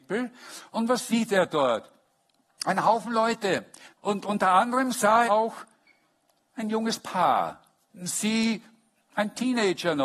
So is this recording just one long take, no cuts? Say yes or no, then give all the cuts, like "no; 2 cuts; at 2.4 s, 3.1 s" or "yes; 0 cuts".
no; 3 cuts; at 4.0 s, 5.3 s, 7.9 s